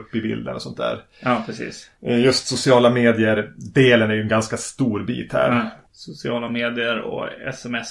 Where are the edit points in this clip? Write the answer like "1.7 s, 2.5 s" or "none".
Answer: none